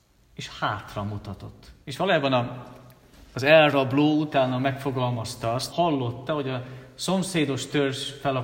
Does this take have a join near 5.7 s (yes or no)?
yes